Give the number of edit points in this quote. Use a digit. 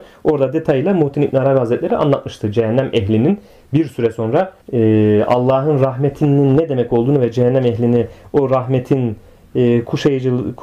1